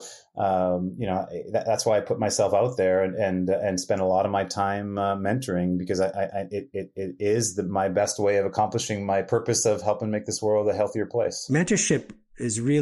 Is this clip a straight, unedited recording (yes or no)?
yes